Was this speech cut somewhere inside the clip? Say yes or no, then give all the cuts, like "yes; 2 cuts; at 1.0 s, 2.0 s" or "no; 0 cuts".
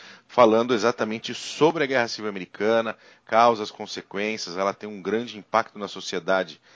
no; 0 cuts